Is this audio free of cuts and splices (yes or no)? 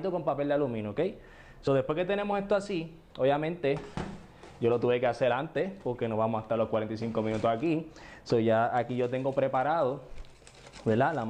yes